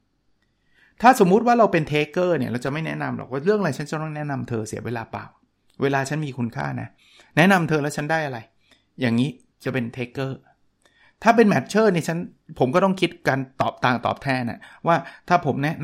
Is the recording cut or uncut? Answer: uncut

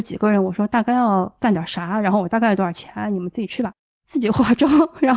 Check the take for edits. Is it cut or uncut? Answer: cut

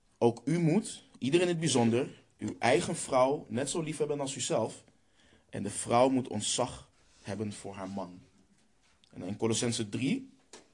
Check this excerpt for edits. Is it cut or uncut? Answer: uncut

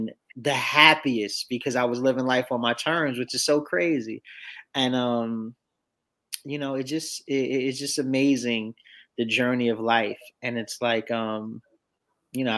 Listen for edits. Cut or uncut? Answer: uncut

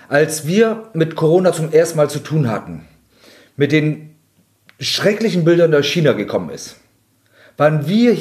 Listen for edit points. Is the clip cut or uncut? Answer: uncut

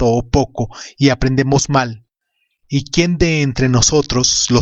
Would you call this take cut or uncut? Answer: cut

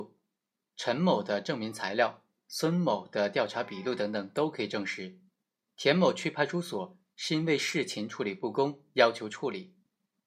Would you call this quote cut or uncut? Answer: uncut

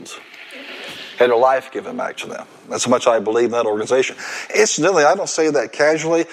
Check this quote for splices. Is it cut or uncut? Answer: uncut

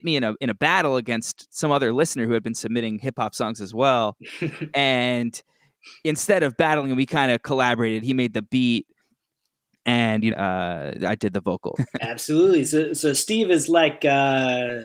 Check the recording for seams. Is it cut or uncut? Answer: cut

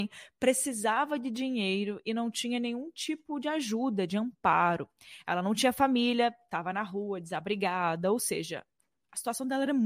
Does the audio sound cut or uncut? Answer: uncut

